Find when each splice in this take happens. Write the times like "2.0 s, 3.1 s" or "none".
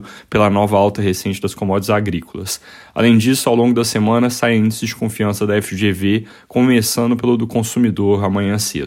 none